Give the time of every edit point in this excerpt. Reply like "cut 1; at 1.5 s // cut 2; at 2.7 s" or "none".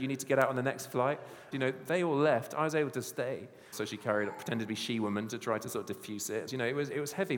cut 1; at 1.5 s // cut 2; at 3.7 s // cut 3; at 6.5 s